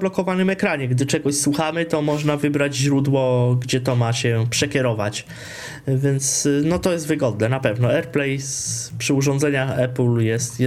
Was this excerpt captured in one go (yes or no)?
yes